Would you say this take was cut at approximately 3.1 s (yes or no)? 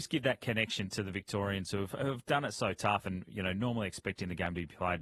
no